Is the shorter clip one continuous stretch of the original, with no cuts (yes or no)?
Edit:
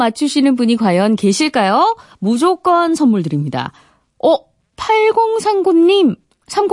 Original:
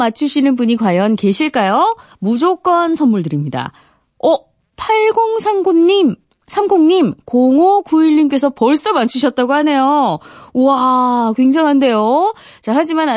yes